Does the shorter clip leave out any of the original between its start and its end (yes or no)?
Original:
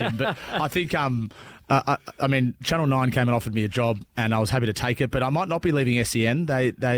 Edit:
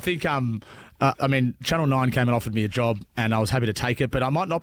yes